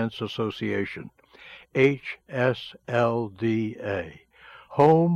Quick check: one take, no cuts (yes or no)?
yes